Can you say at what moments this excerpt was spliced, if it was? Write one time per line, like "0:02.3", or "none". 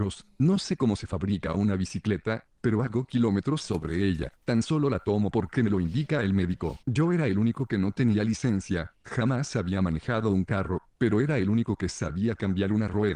0:04.4
0:06.8